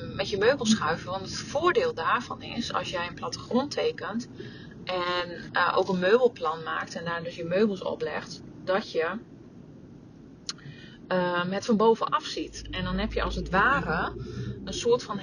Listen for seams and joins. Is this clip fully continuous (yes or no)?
yes